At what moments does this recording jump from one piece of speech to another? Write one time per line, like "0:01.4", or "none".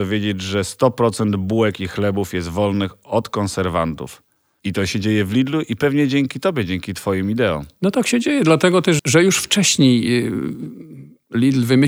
0:04.6
0:09.0